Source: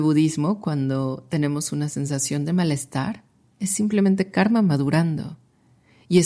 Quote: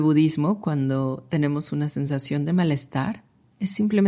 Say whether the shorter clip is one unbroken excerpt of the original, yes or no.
yes